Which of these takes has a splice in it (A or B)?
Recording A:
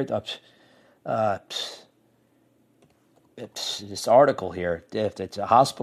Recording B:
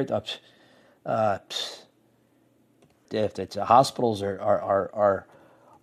B